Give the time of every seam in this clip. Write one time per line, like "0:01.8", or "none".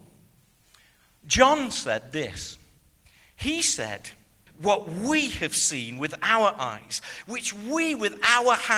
0:04.5
0:07.2